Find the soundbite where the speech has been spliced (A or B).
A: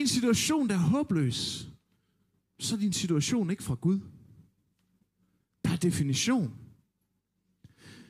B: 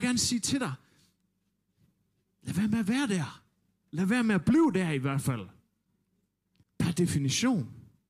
B